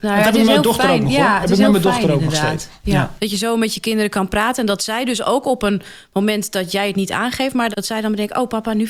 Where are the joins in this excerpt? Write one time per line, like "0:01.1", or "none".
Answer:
0:03.2
0:07.7